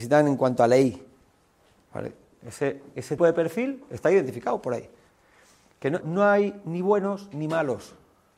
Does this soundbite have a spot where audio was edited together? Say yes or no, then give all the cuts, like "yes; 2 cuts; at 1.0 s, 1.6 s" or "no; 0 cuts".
yes; 2 cuts; at 3.2 s, 6.0 s